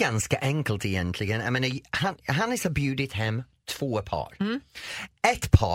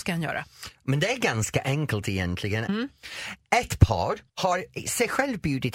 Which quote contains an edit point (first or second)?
second